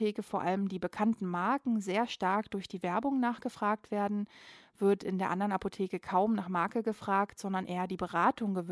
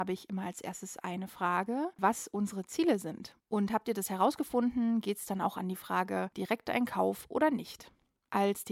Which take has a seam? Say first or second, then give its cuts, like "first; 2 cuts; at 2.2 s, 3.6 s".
second; 2 cuts; at 2.0 s, 3.4 s